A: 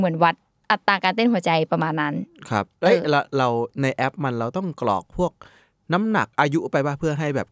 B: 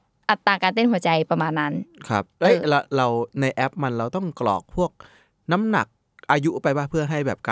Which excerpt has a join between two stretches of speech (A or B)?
A